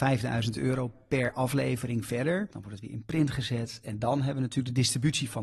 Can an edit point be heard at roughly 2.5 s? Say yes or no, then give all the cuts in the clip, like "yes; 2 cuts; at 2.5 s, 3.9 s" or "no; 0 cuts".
yes; 1 cut; at 2.5 s